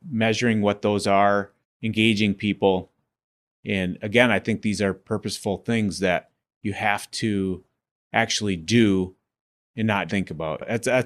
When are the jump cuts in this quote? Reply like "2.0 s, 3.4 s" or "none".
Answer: 1.6 s, 3.5 s, 10.1 s